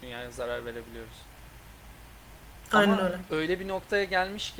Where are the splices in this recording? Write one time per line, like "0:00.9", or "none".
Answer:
none